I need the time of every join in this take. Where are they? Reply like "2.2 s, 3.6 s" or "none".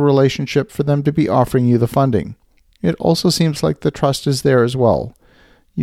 none